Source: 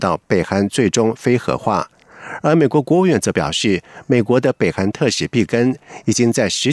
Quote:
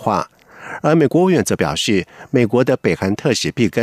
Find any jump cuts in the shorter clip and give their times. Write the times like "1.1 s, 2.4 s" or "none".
1.1 s